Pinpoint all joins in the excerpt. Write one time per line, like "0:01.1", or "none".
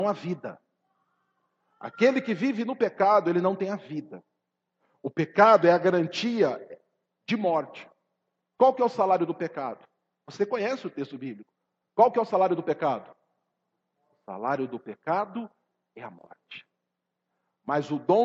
none

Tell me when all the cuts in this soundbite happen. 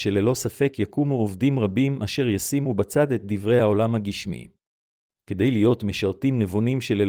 0:05.1

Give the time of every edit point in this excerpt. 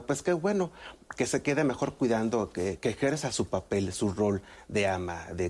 none

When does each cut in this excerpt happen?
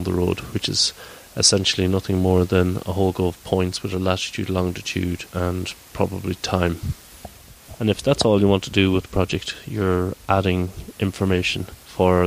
0:05.3
0:07.7

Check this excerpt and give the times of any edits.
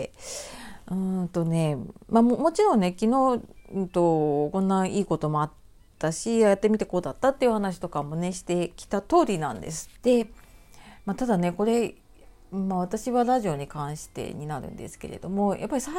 0:10.0

